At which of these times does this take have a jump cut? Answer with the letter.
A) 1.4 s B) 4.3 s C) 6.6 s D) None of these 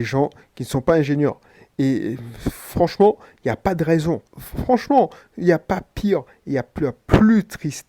B